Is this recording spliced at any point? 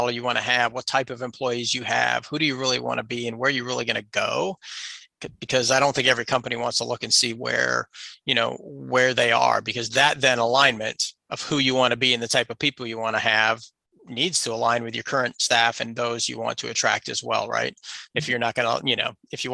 yes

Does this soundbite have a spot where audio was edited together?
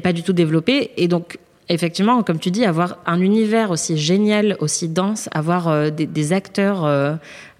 no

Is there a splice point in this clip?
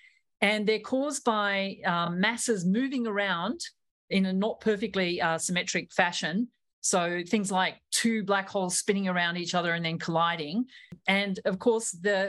no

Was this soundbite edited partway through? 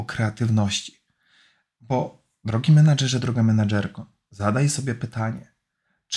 no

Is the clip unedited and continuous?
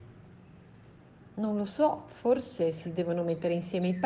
yes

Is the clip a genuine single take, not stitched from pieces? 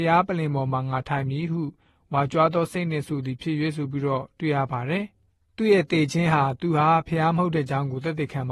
yes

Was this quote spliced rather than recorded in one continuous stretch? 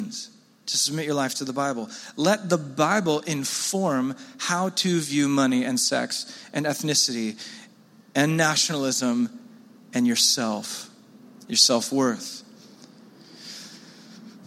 no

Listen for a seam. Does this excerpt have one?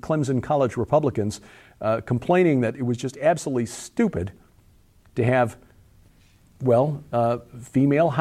no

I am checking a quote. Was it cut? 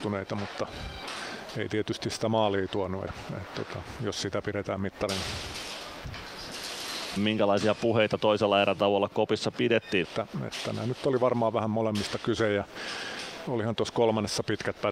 yes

